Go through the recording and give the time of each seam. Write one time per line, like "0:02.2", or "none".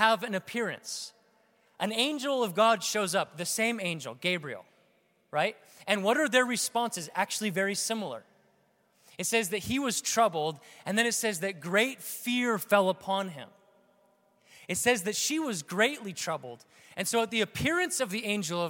none